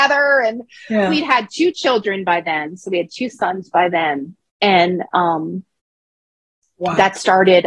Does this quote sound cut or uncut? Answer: uncut